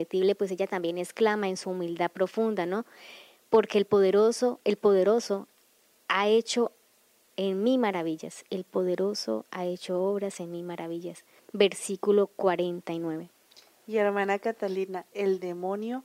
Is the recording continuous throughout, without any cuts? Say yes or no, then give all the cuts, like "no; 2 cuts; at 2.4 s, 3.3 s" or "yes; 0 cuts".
no; 2 cuts; at 11.4 s, 15.1 s